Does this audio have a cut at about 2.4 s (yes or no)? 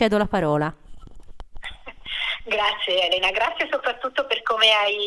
no